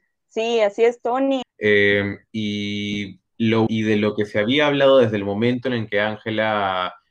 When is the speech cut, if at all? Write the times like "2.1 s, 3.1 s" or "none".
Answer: 1.4 s, 3.7 s